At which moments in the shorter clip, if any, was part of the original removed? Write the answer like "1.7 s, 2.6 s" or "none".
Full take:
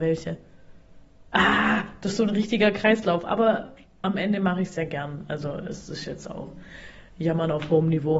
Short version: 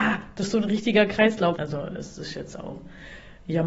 1.6 s

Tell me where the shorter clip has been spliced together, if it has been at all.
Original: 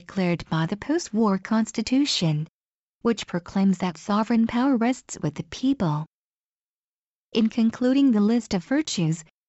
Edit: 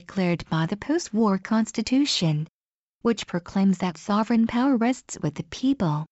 none

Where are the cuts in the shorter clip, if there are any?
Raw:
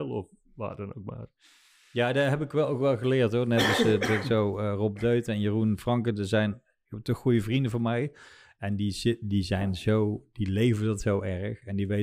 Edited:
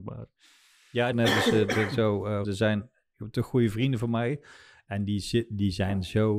1.1 s, 2.4 s

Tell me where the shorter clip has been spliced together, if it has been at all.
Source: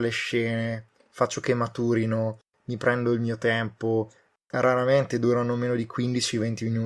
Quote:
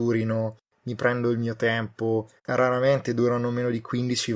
2.4 s

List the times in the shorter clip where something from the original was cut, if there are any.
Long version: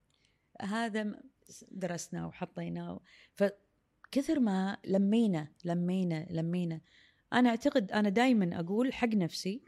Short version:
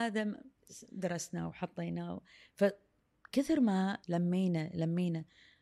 4.0 s

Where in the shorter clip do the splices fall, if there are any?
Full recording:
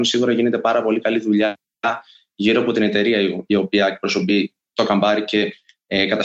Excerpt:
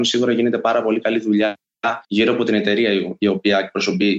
2.0 s

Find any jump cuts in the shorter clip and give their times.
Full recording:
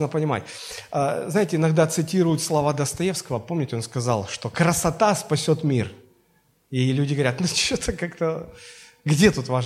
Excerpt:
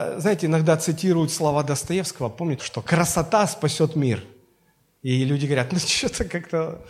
2.6 s

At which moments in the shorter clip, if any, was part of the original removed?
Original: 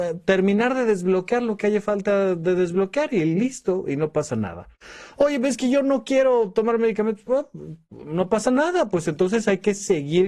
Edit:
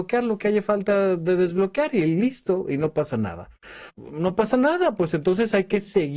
3.9 s

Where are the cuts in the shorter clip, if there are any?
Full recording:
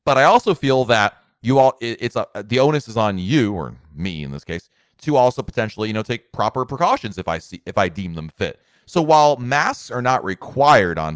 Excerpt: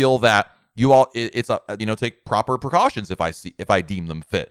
1.8 s

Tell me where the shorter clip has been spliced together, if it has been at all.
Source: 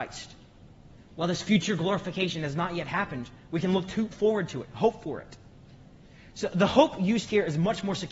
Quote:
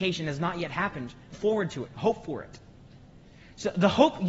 1.3 s

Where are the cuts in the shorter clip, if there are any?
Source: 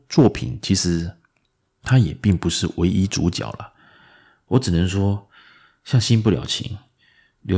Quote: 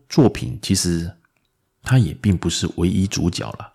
none

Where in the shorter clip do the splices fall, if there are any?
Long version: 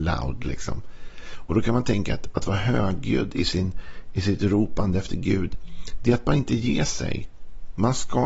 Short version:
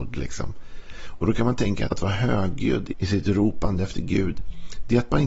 1.9 s, 2.9 s

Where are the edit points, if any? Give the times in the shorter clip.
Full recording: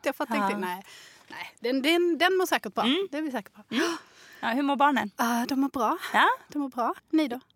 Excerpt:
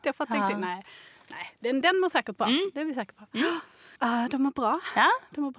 1.8 s, 4.0 s

